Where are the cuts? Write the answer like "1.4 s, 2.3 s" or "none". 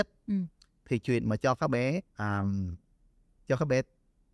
2.1 s